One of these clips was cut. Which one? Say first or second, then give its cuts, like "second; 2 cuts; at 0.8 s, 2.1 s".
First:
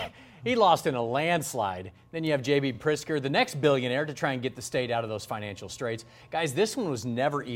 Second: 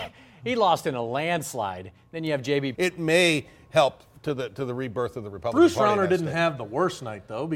second; 1 cut; at 2.7 s